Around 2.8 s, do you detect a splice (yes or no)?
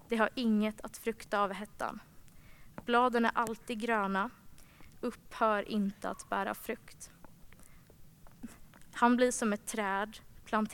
no